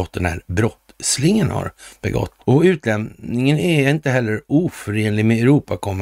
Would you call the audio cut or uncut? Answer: cut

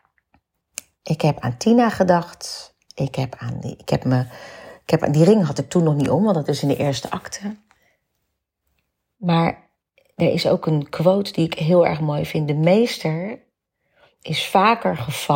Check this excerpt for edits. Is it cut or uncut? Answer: uncut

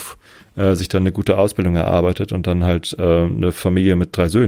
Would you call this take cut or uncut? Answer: uncut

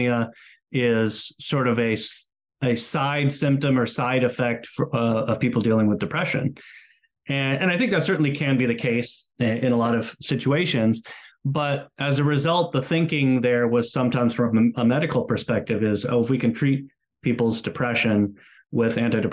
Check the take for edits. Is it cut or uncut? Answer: uncut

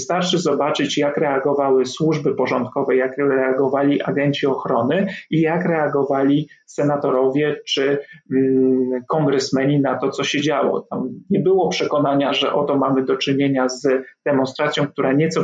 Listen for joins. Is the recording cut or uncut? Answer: uncut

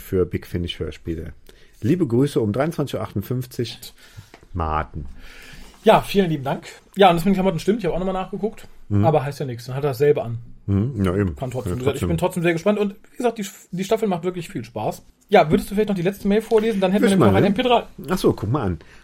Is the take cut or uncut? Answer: cut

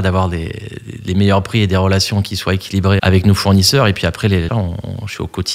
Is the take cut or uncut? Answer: cut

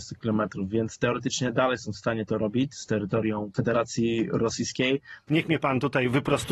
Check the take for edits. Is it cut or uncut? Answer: cut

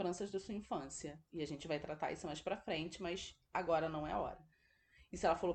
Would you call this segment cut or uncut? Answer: uncut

